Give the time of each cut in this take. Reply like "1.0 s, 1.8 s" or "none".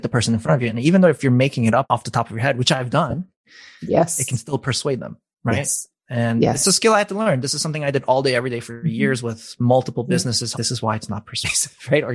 10.5 s